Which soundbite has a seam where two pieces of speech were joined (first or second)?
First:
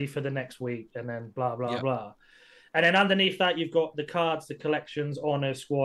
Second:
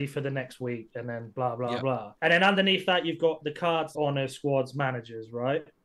second